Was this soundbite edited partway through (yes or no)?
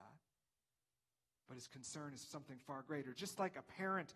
no